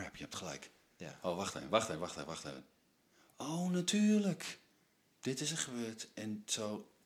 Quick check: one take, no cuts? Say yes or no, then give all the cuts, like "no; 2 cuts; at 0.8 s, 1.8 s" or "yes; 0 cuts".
no; 1 cut; at 1.7 s